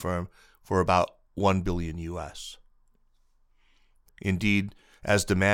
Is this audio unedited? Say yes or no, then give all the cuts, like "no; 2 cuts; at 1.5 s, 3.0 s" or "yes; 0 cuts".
no; 1 cut; at 4.1 s